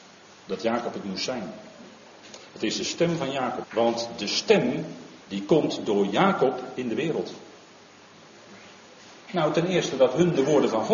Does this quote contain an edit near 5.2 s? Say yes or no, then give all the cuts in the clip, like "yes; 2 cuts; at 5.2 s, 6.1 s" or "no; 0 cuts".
yes; 3 cuts; at 3.6 s, 5.2 s, 9.2 s